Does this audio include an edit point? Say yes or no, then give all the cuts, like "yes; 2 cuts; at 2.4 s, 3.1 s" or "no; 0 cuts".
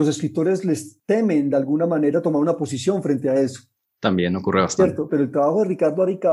yes; 1 cut; at 5.1 s